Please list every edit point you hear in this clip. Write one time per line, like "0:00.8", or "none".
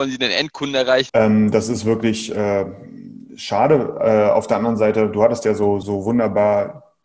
0:01.1
0:05.8